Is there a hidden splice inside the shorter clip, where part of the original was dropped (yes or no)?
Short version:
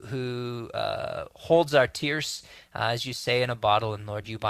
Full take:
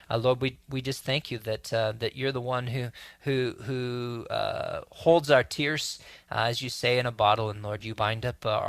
no